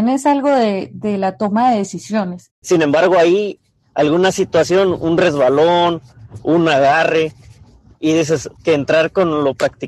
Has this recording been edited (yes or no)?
yes